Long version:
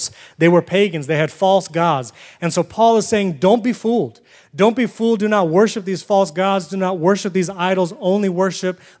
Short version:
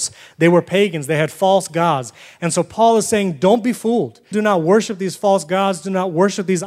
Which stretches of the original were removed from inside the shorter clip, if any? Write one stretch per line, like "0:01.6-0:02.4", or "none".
0:04.3-0:05.2